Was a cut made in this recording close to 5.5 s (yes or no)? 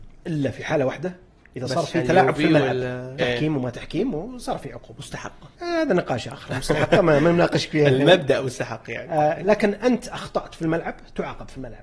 yes